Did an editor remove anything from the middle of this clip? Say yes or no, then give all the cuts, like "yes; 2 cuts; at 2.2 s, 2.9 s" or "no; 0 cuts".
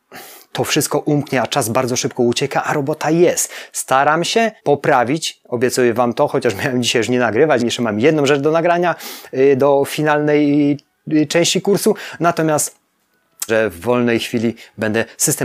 yes; 3 cuts; at 4.6 s, 7.6 s, 13.5 s